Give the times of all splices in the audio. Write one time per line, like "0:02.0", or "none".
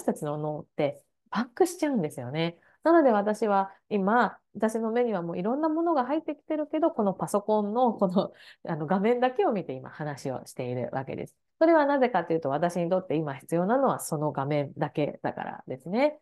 none